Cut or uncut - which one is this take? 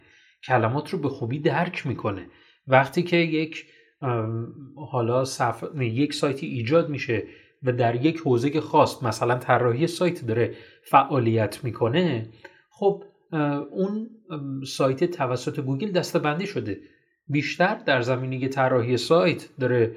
uncut